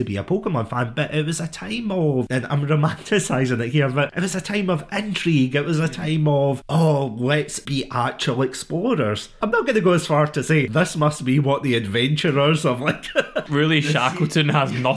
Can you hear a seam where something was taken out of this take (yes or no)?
no